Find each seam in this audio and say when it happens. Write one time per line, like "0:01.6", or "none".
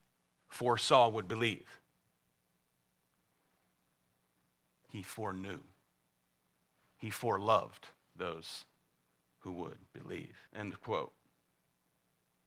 0:10.5